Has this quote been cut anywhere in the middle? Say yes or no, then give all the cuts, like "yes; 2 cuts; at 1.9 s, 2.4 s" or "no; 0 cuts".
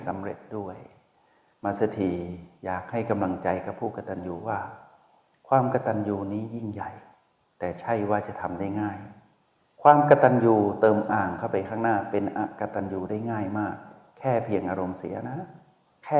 yes; 1 cut; at 11.1 s